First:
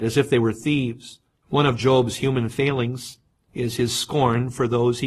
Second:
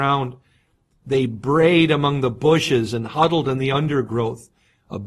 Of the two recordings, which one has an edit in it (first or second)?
first